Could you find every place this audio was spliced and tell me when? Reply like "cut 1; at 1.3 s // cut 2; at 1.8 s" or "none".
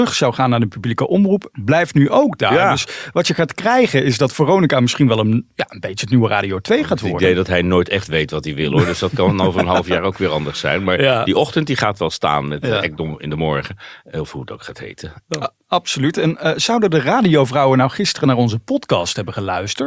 cut 1; at 15.2 s